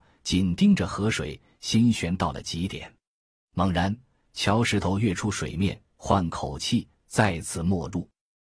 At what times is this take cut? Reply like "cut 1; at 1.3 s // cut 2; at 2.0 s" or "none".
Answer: none